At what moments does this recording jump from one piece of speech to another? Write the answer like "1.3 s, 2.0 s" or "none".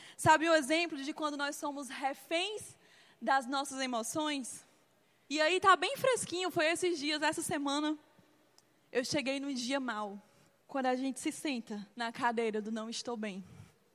5.3 s, 10.6 s, 11.9 s